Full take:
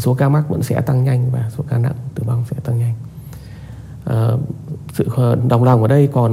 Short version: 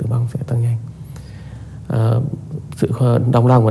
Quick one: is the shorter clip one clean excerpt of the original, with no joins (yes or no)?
yes